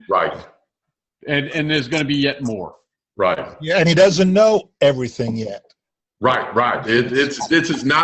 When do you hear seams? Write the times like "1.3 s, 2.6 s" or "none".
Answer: none